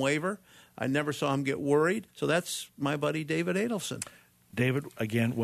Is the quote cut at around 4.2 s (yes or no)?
no